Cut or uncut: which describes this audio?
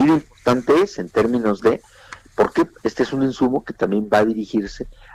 uncut